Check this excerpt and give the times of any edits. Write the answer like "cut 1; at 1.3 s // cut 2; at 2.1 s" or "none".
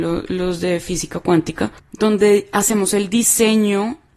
cut 1; at 1.8 s